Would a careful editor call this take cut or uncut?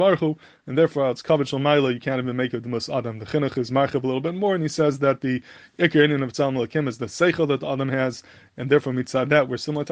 uncut